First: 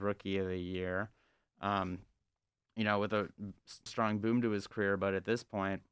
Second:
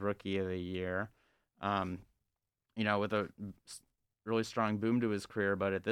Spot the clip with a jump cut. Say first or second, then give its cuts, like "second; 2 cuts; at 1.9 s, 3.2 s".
first; 1 cut; at 3.9 s